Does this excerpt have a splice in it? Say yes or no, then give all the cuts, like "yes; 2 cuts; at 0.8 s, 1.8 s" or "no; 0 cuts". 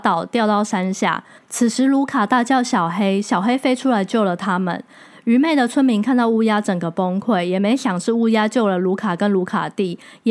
no; 0 cuts